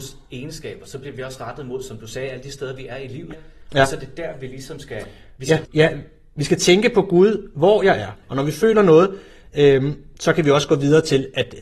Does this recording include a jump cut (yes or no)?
yes